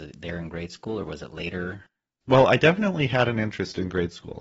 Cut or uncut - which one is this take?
cut